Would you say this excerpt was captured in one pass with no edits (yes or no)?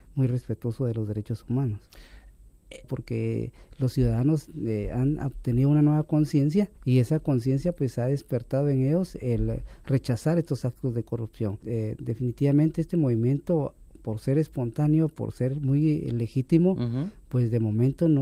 no